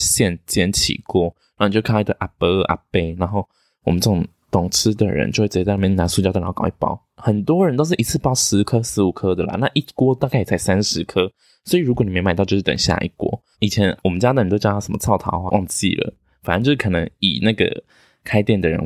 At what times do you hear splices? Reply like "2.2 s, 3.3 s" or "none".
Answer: 13.5 s, 15.5 s